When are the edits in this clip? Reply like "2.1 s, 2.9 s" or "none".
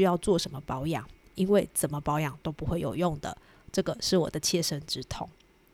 none

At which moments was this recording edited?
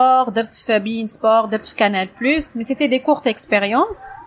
none

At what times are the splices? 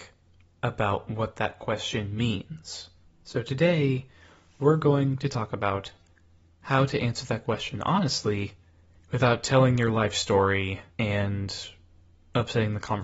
3.1 s, 10.9 s

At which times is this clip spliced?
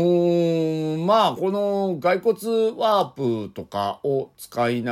none

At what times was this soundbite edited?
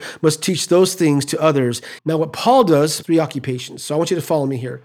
2.0 s, 3.0 s

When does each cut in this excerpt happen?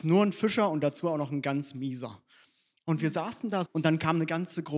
3.7 s

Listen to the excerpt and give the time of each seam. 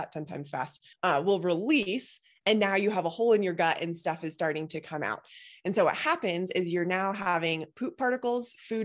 0.9 s

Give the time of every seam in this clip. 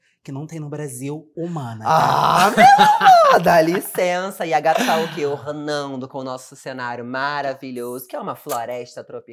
none

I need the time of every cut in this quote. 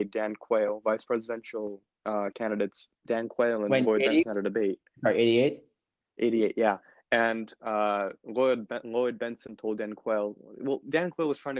none

